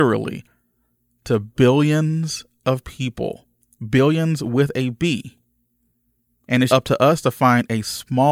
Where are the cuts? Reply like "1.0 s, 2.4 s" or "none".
6.7 s